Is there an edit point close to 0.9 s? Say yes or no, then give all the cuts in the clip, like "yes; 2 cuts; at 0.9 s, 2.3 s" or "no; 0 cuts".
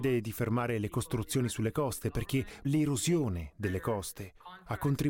no; 1 cut; at 2.6 s